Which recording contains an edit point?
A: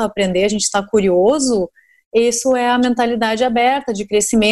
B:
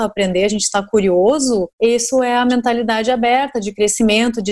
B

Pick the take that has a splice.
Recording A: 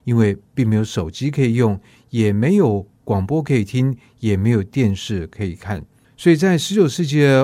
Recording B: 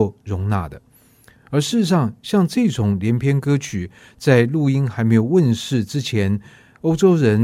A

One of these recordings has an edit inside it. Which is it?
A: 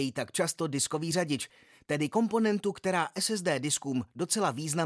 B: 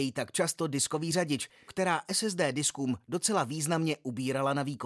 B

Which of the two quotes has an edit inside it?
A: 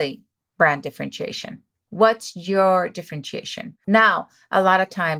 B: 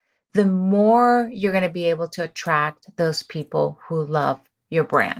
A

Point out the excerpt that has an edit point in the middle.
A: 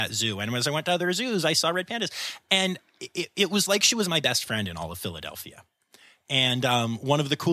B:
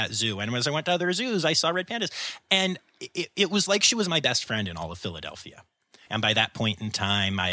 B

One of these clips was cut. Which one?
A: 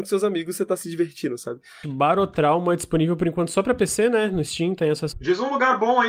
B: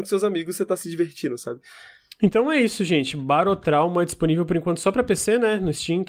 A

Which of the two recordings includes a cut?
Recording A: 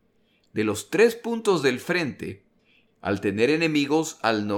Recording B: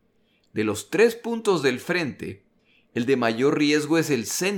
A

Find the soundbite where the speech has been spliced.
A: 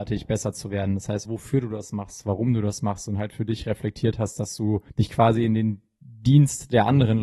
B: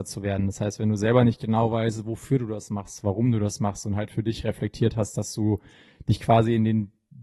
A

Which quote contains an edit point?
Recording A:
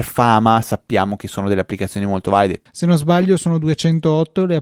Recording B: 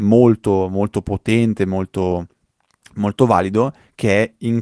A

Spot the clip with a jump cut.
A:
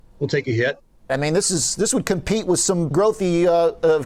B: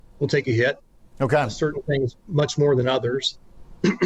A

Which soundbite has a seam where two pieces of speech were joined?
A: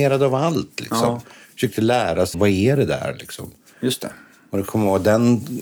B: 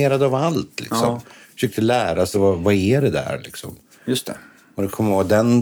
A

